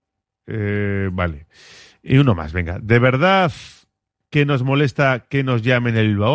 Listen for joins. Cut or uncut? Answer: uncut